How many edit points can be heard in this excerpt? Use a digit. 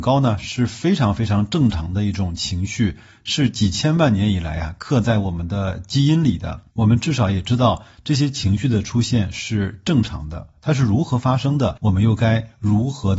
1